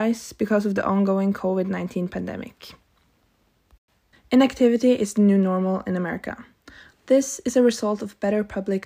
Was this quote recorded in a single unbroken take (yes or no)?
no